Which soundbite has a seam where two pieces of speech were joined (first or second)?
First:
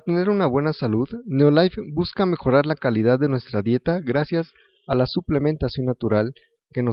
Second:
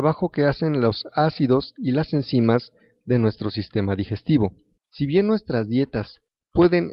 second